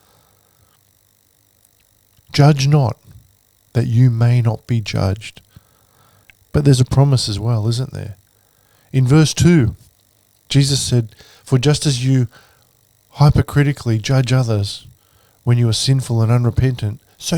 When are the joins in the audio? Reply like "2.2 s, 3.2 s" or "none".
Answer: none